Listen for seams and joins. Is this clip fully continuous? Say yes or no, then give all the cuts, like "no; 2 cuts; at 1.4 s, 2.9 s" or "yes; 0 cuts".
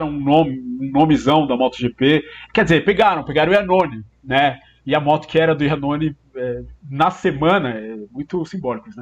yes; 0 cuts